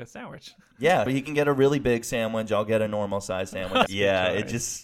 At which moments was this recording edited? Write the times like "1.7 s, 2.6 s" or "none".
1.1 s, 3.9 s